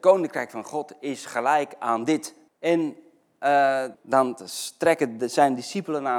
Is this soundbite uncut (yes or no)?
no